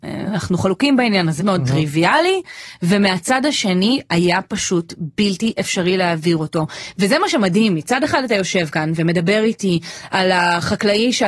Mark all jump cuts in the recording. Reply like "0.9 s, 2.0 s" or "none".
1.4 s